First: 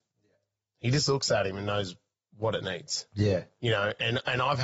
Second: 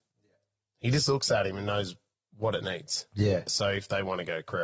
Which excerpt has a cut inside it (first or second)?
second